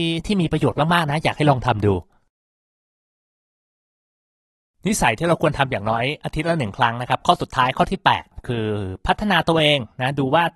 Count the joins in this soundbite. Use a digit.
0